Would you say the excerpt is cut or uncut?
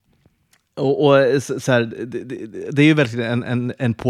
uncut